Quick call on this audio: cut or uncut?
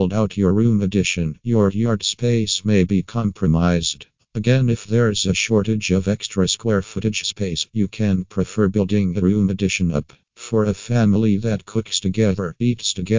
cut